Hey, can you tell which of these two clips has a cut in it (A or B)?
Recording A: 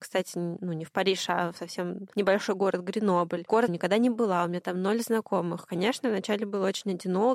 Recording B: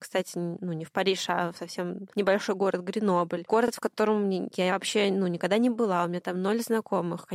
A